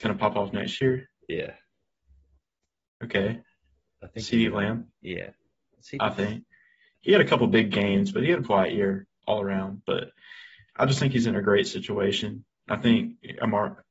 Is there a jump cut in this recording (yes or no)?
yes